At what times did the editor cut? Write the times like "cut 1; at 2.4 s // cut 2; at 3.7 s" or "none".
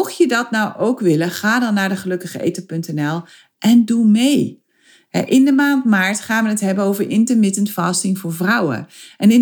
none

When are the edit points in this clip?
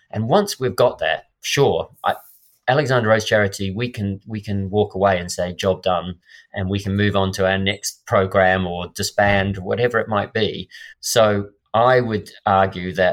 cut 1; at 10.9 s

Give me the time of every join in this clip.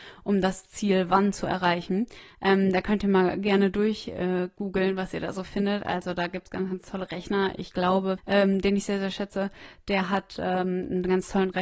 cut 1; at 8.2 s

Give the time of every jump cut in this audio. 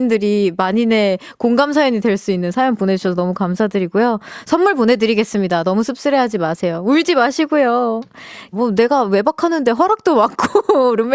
cut 1; at 8.5 s

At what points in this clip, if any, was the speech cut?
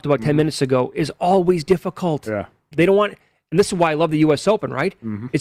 cut 1; at 2.7 s

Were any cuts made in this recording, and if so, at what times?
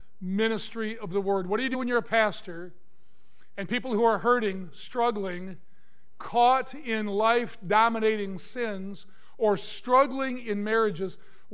none

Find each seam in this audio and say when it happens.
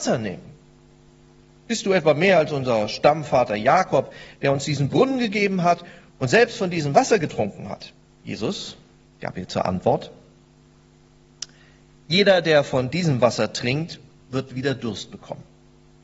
cut 1; at 8.0 s

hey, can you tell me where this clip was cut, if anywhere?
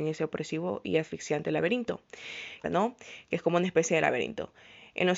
cut 1; at 2.6 s

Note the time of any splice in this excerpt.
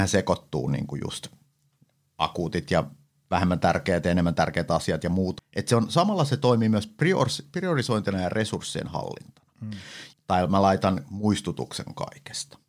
cut 1; at 5.4 s // cut 2; at 10.1 s

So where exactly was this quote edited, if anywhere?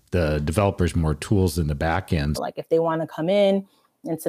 cut 1; at 2.3 s

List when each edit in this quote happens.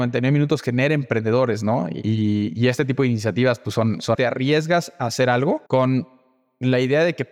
cut 1; at 4.1 s // cut 2; at 5.7 s

